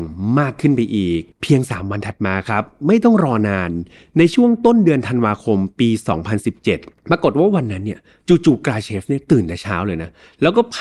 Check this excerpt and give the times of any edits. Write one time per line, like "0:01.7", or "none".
0:01.3